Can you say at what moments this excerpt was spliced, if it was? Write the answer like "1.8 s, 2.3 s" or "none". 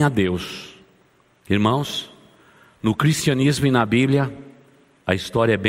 none